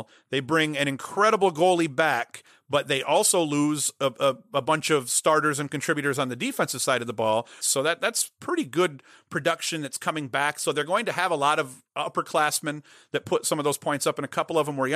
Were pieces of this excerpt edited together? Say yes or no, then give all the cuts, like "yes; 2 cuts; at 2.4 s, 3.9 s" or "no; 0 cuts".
yes; 1 cut; at 7.6 s